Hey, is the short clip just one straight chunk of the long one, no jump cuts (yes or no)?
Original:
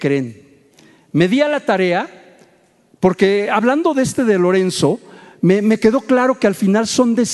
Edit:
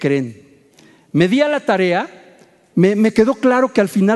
no